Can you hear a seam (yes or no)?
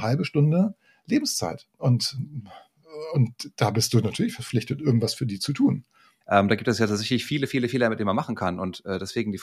yes